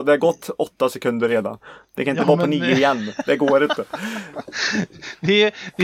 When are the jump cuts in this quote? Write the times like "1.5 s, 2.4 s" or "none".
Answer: none